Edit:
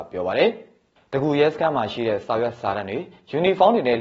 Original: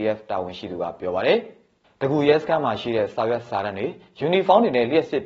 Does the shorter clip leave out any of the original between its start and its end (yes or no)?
no